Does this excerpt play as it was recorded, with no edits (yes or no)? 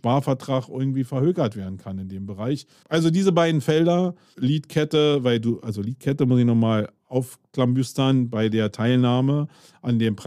no